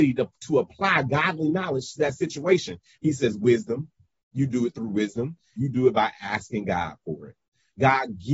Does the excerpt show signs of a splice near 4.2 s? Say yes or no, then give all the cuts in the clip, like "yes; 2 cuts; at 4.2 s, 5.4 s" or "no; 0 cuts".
no; 2 cuts; at 3.0 s, 5.6 s